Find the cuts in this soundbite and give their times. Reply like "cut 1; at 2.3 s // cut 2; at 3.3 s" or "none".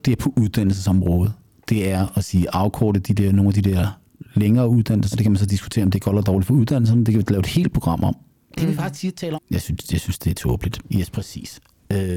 cut 1; at 5.1 s // cut 2; at 9.3 s // cut 3; at 10.8 s